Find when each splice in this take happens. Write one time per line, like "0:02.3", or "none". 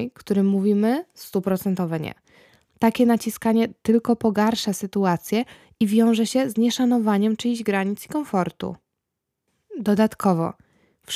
0:02.7